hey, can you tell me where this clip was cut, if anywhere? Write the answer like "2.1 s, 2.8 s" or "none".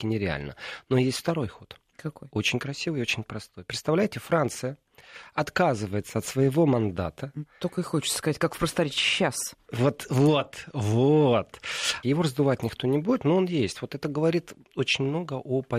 12.0 s